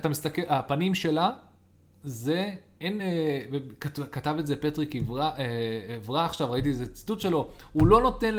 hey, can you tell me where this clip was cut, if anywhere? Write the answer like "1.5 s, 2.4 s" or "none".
none